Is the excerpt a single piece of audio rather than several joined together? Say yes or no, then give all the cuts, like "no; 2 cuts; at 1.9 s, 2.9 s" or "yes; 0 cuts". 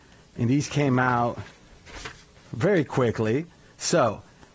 yes; 0 cuts